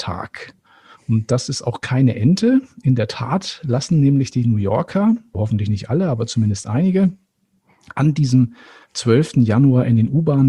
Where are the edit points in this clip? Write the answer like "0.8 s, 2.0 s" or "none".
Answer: 5.3 s